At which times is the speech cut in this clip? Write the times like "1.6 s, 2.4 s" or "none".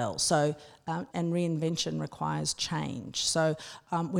1.1 s